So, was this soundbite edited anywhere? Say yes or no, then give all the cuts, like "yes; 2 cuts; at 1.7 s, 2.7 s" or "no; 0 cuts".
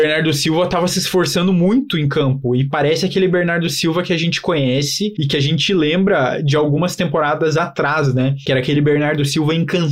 no; 0 cuts